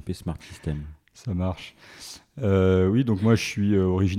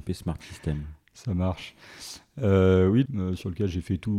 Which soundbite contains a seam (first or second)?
second